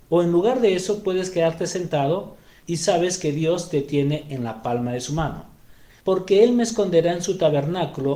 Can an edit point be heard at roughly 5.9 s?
yes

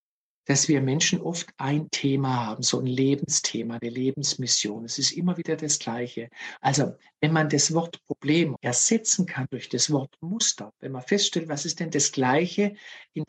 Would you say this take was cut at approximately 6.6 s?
yes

